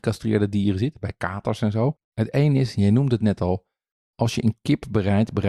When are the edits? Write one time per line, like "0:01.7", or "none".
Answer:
0:02.0

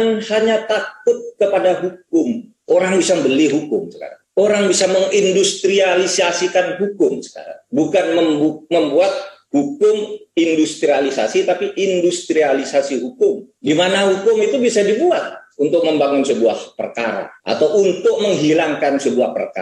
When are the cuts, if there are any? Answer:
0:02.6

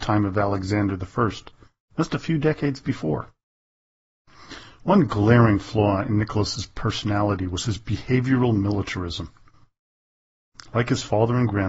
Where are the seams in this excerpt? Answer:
none

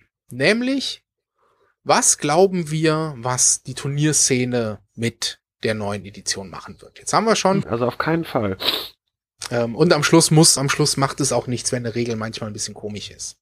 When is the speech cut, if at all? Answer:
0:07.6
0:10.6

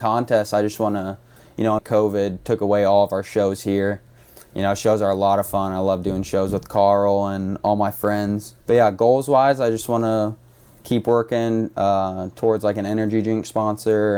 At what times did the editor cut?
0:01.8
0:08.6

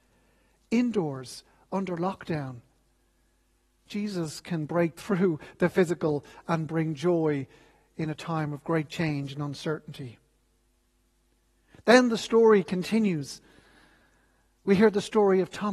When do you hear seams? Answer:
none

